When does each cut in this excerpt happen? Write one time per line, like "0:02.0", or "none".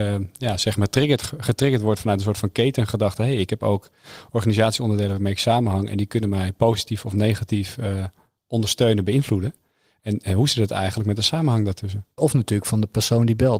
0:12.2